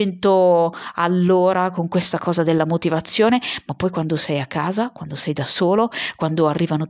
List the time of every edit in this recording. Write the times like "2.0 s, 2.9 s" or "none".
none